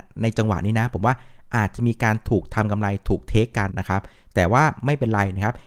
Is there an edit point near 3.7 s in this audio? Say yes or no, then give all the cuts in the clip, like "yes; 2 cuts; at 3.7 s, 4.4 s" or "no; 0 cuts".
yes; 1 cut; at 3.7 s